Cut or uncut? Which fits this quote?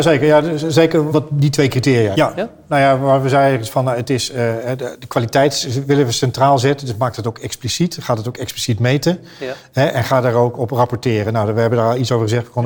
cut